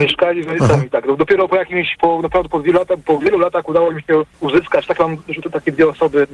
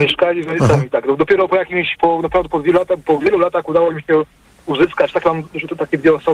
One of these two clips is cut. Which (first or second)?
first